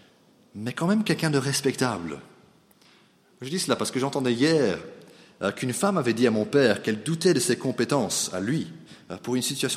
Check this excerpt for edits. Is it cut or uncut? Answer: uncut